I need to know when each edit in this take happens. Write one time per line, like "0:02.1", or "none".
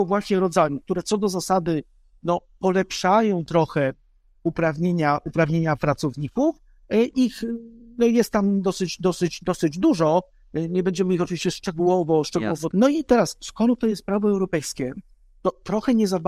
0:12.7